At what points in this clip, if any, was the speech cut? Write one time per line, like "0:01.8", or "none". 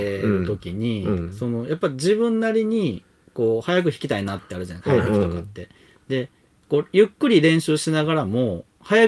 none